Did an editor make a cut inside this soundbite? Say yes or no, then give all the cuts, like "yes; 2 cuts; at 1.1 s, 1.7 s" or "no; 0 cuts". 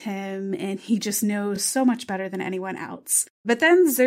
no; 0 cuts